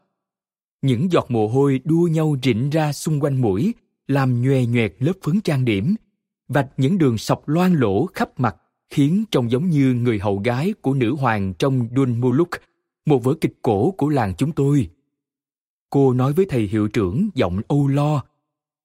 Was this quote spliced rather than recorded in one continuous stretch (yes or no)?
no